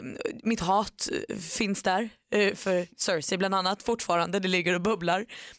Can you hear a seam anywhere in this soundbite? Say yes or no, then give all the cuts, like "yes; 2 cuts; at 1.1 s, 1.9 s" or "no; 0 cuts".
no; 0 cuts